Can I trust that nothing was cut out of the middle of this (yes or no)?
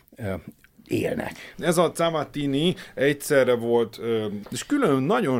no